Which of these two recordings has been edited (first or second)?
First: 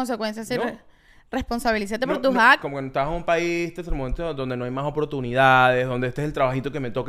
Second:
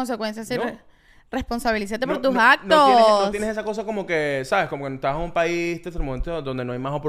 first